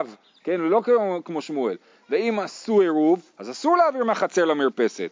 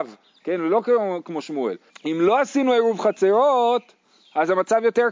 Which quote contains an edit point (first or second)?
second